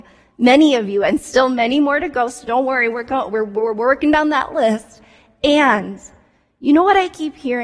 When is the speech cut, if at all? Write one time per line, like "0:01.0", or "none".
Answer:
none